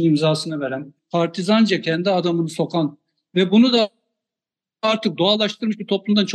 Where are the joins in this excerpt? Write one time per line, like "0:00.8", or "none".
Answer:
0:01.0